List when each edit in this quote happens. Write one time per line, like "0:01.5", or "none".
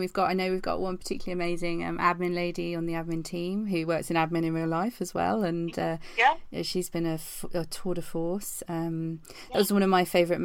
none